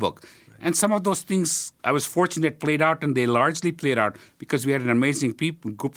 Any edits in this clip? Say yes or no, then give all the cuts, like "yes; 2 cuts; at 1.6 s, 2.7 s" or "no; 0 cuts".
yes; 1 cut; at 1.8 s